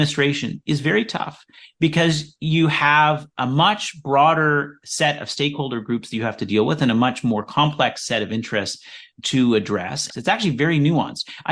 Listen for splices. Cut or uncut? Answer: cut